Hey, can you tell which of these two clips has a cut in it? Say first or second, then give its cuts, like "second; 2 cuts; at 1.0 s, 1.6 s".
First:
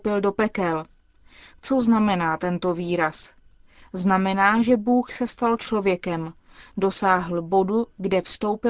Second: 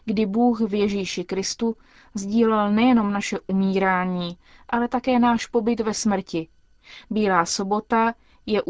second; 1 cut; at 7.0 s